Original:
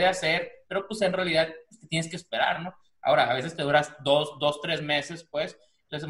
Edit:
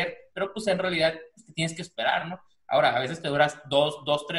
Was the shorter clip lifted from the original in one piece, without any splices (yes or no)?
yes